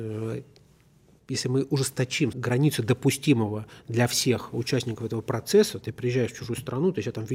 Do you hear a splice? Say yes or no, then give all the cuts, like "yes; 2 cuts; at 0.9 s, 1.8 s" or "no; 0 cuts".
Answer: yes; 2 cuts; at 2.3 s, 5.8 s